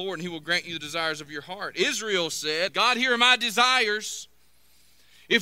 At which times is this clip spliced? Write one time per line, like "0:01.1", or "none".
0:02.7